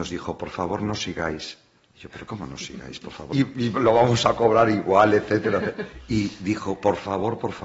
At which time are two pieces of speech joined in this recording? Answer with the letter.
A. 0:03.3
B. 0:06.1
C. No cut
A